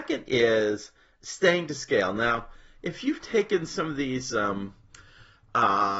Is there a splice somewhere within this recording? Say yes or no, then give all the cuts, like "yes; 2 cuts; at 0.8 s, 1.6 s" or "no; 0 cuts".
no; 0 cuts